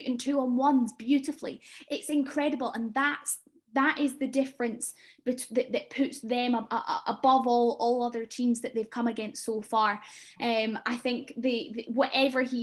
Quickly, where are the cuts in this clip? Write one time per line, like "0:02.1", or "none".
none